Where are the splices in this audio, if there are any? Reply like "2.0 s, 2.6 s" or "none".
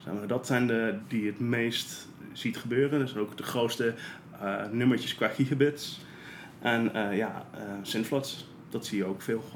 1.0 s